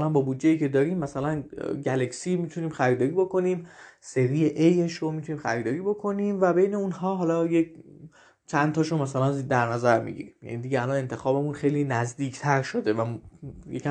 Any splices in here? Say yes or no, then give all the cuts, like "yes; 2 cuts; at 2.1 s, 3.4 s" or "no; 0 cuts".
no; 0 cuts